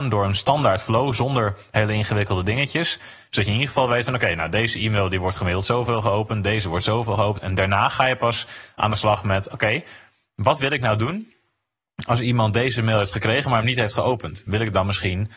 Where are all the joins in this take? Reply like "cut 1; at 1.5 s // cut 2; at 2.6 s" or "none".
none